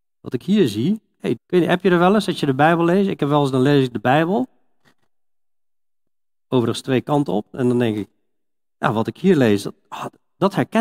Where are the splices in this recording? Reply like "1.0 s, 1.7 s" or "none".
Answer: 1.4 s

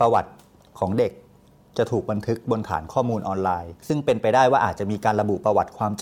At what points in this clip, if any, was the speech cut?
3.8 s

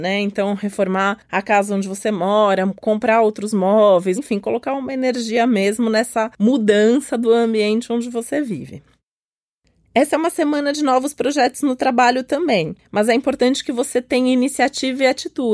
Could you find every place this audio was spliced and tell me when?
4.2 s

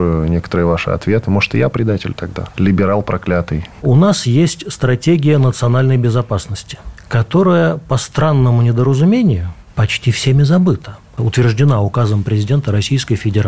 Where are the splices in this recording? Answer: 3.8 s

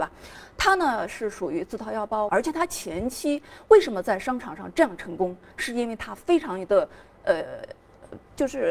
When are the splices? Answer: 2.3 s

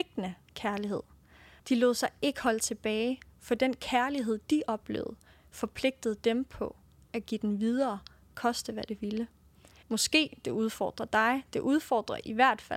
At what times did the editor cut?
1.6 s, 9.8 s

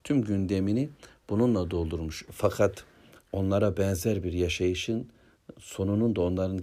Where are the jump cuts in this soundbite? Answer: 2.3 s

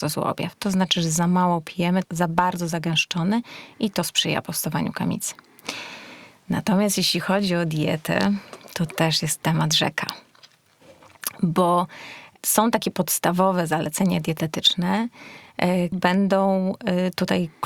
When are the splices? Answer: 2.0 s, 15.9 s

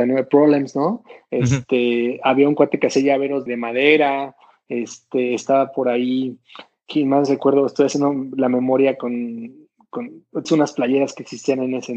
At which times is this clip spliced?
3.5 s, 10.4 s

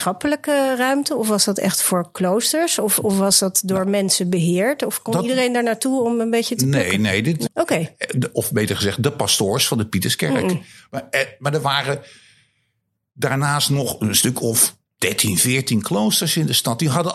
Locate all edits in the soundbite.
7.5 s

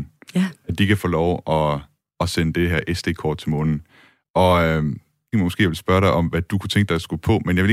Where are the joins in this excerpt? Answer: 5.3 s

